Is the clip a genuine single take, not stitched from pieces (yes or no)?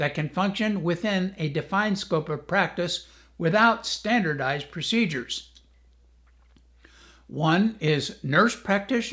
yes